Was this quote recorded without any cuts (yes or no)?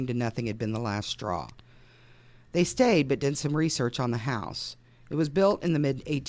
yes